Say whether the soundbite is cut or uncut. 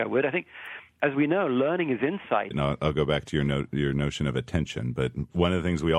cut